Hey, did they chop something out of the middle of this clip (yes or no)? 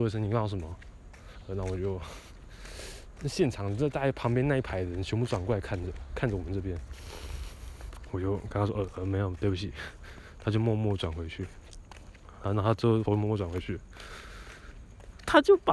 yes